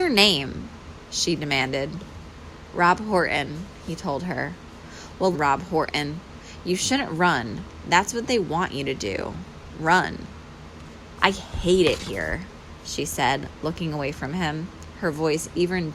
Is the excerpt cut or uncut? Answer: cut